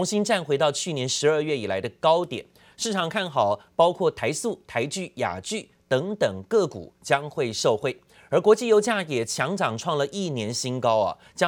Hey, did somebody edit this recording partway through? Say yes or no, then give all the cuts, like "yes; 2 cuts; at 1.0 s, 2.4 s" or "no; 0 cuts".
no; 0 cuts